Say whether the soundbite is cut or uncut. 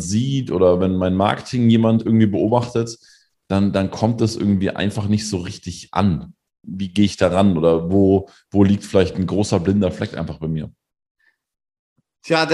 uncut